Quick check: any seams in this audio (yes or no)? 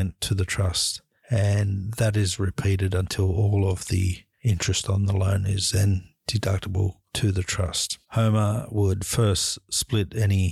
yes